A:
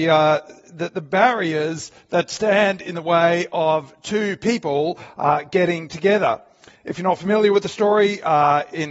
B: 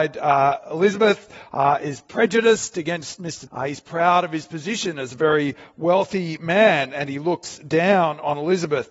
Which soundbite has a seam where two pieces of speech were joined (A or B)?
B